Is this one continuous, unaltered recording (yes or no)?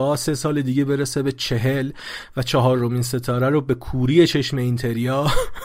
yes